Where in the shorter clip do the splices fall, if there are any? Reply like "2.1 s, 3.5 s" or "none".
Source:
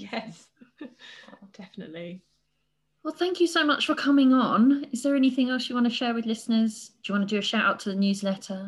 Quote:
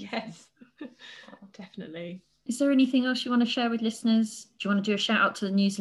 2.5 s